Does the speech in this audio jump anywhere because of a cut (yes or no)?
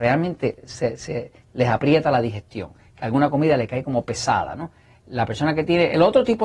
no